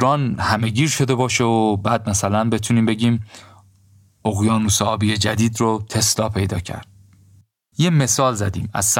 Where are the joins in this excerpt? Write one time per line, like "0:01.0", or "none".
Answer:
0:07.7